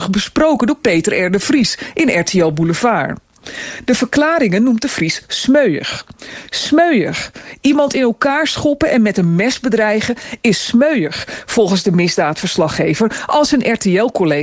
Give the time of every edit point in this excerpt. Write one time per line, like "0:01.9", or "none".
none